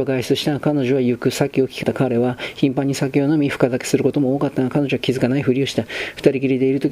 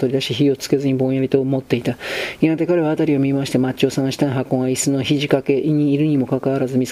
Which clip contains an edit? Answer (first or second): first